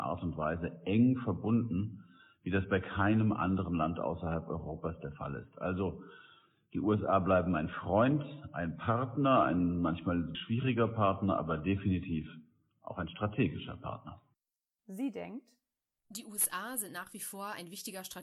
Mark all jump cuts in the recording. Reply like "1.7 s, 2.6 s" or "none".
10.3 s, 14.8 s